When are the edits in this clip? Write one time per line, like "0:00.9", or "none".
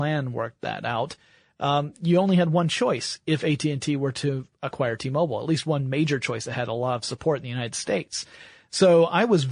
none